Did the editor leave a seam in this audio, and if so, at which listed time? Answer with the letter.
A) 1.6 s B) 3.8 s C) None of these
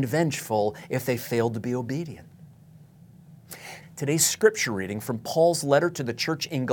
B